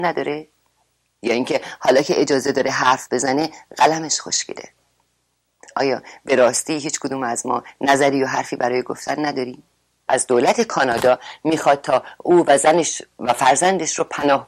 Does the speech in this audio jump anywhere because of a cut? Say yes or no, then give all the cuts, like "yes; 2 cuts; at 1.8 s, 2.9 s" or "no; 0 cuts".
yes; 1 cut; at 10.1 s